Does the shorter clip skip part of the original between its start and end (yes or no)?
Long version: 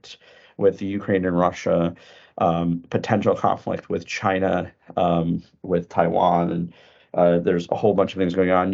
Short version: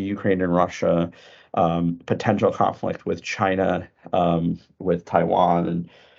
no